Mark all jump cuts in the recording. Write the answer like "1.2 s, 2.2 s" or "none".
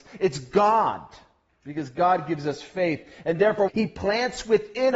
3.7 s